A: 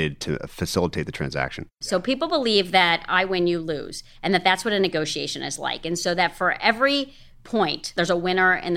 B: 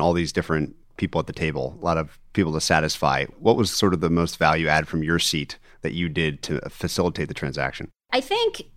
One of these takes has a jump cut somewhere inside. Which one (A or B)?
A